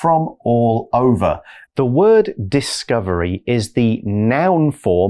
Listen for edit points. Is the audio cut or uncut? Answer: cut